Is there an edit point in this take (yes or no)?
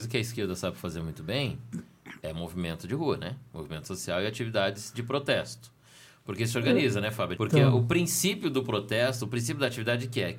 yes